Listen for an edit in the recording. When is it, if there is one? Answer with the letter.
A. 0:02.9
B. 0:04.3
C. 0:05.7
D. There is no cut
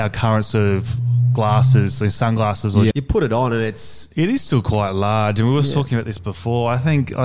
A